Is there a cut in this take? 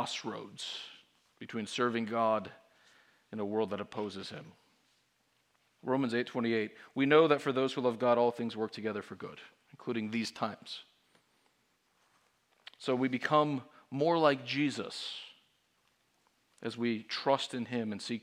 yes; 1 cut; at 5.8 s

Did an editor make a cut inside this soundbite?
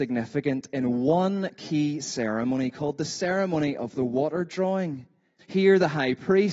yes; 1 cut; at 5.4 s

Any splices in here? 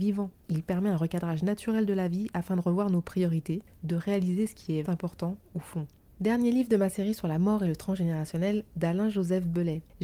yes; 2 cuts; at 4.8 s, 8.7 s

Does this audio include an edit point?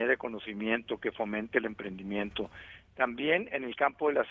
no; 0 cuts

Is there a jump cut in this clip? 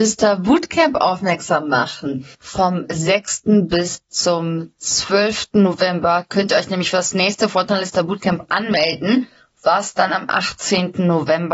no; 0 cuts

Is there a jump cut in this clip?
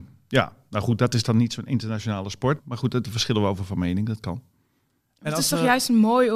yes; 1 cut; at 2.6 s

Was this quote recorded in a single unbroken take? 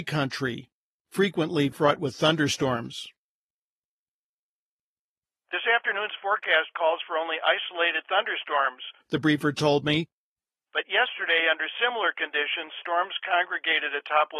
yes; 0 cuts

